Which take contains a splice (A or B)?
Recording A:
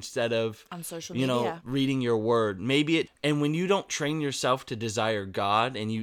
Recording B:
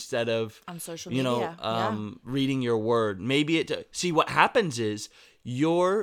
A